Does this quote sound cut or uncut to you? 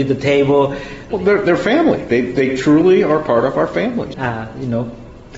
cut